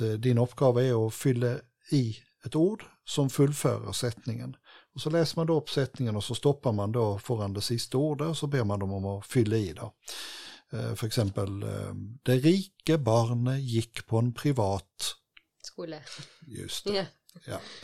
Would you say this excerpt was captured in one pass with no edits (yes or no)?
yes